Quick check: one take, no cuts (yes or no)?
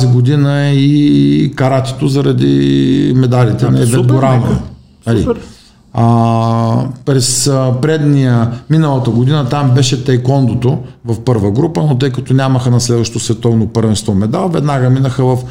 yes